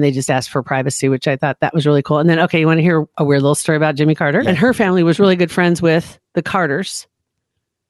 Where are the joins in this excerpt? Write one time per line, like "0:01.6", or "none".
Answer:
0:04.4
0:06.3